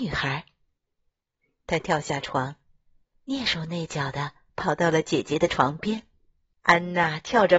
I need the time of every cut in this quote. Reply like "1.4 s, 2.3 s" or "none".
6.5 s